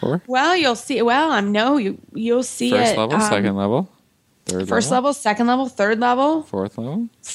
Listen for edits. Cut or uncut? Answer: uncut